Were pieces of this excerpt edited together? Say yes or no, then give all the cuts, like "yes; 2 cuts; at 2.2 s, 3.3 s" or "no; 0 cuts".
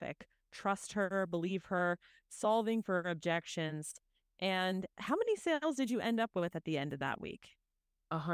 no; 0 cuts